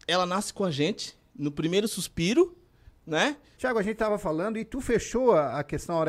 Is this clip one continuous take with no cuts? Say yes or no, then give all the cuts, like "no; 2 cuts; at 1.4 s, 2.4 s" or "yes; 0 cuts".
no; 1 cut; at 3.6 s